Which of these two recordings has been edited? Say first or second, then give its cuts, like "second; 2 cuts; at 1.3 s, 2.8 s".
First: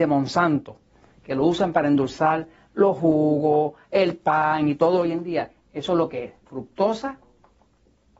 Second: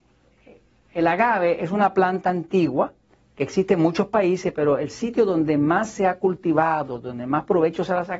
first; 1 cut; at 5.6 s